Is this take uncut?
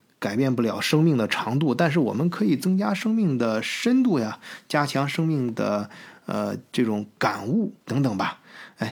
no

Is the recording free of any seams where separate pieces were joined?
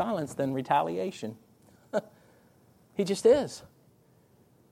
yes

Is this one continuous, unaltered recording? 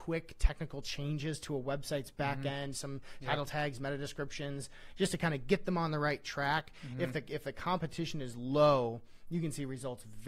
yes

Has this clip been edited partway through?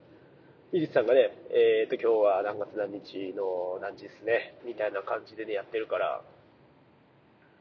yes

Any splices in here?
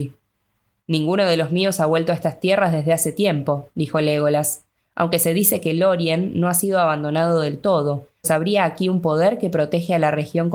yes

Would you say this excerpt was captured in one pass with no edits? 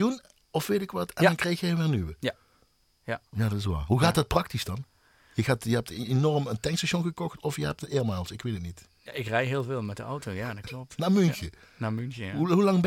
no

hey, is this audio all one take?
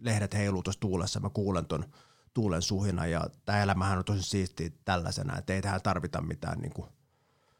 yes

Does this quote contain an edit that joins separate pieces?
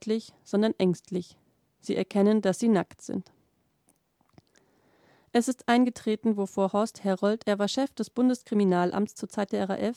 no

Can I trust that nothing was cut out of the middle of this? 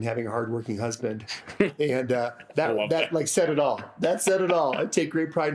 yes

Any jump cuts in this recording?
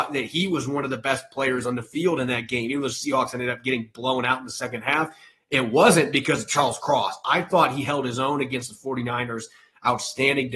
no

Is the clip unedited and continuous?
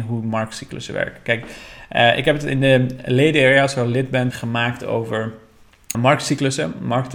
no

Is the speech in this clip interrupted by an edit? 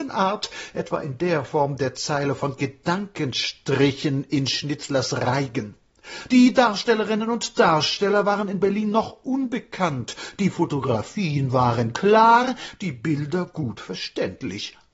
no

